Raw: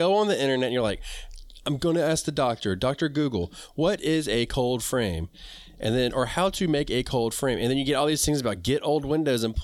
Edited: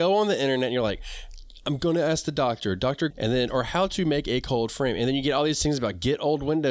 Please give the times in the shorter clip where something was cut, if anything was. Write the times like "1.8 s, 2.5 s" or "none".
3.1 s